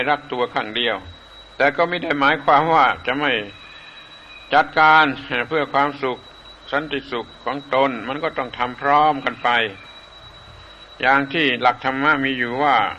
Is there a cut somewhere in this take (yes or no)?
yes